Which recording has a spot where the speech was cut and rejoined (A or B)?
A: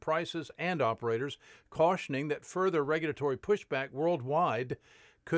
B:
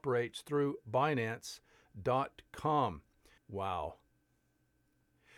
B